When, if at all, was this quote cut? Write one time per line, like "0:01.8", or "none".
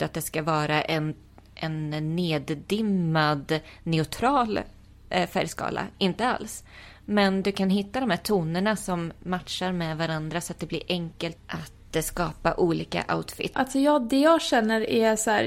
0:11.4
0:13.5